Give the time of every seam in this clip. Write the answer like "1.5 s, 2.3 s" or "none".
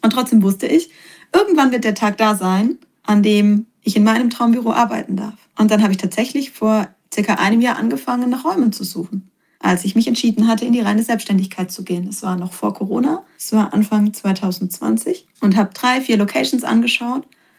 5.5 s